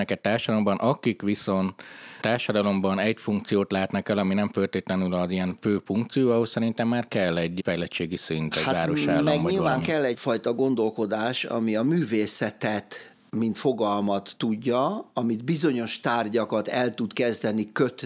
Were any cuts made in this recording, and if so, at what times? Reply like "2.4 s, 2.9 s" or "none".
none